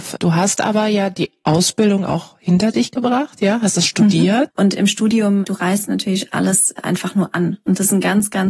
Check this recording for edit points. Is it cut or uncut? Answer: cut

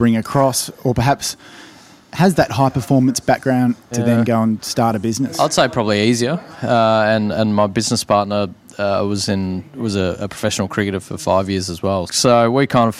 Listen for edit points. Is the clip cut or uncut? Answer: cut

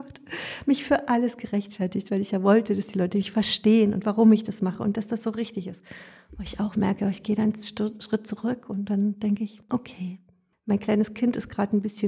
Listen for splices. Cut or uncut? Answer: uncut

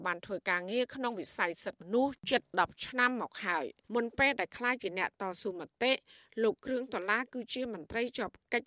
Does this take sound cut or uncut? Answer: cut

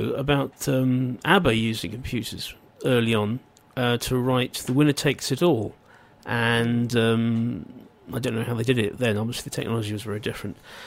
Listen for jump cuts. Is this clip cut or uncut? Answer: uncut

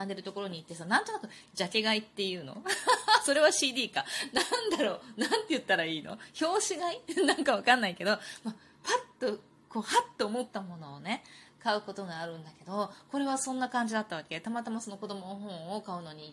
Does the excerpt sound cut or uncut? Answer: uncut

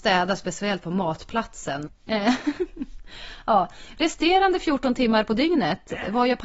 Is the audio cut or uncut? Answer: cut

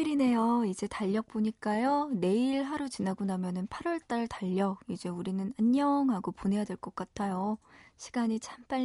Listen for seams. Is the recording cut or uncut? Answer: uncut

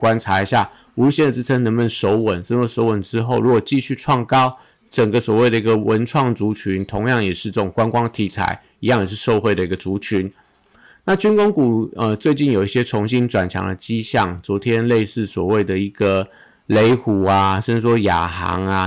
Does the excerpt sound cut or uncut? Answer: uncut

